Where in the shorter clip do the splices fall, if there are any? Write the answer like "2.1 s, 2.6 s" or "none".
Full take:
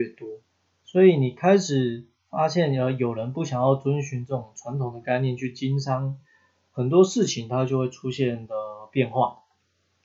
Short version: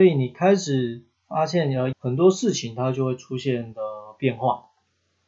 1.9 s